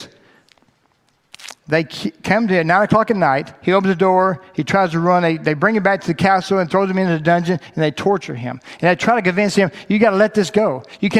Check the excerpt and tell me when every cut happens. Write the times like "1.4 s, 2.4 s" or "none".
none